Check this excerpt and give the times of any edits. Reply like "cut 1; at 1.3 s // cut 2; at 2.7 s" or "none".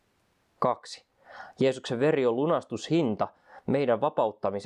none